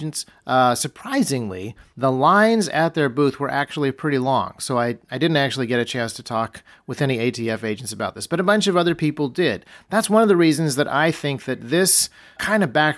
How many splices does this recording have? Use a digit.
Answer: 0